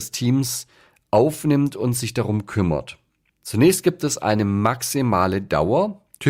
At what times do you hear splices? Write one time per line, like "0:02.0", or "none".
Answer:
0:03.3

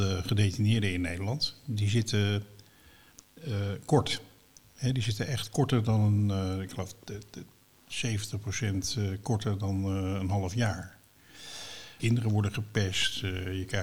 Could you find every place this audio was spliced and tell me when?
0:12.0

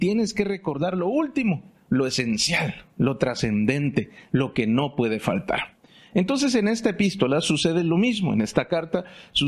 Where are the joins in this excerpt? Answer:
none

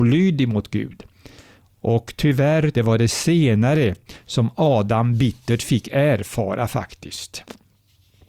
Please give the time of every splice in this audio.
0:02.7

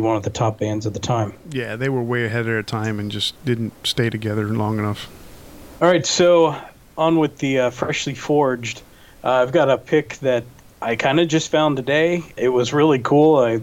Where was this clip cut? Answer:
0:03.4

